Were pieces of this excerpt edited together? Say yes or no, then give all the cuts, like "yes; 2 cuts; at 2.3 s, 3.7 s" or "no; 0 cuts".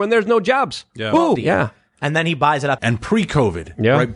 yes; 2 cuts; at 1.4 s, 2.8 s